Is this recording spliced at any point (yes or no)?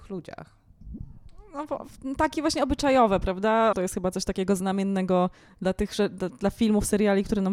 yes